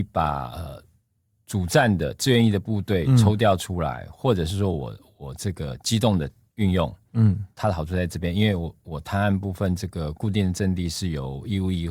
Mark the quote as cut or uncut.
uncut